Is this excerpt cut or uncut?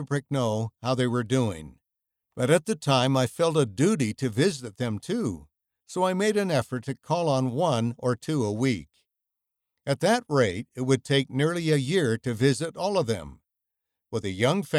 cut